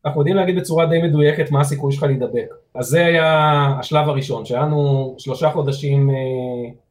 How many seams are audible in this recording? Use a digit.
1